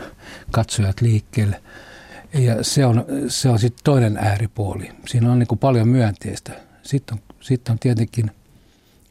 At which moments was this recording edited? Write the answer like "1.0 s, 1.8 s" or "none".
none